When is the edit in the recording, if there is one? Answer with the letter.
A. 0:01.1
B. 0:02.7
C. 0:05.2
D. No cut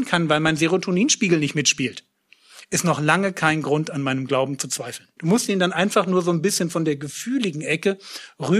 C